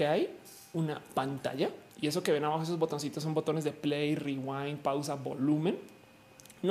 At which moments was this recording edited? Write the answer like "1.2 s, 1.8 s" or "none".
1.9 s